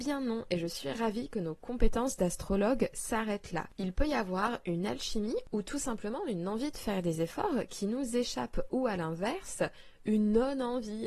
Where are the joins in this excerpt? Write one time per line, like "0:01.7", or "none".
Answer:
none